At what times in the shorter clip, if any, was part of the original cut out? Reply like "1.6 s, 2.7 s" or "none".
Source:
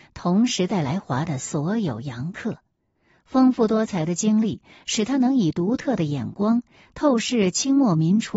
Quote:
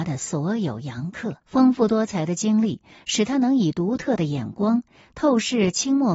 1.4 s